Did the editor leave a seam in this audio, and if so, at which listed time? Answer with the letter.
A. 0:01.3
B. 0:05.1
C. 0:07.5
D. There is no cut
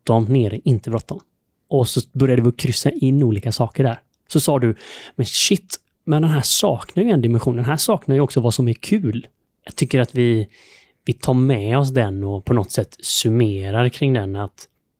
D